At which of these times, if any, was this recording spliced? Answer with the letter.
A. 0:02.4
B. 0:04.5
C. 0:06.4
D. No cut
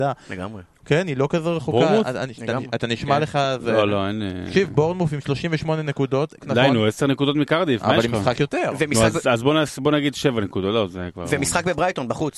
C